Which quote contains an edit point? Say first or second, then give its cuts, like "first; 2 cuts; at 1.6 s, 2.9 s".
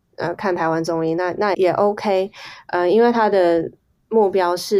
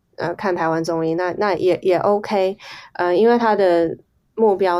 first; 1 cut; at 1.5 s